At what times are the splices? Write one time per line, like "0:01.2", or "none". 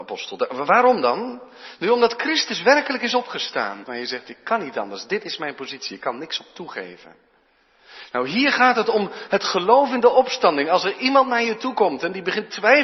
0:03.9